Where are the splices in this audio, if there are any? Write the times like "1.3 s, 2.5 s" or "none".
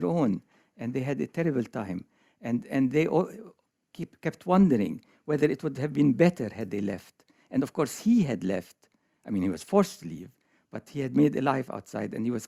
none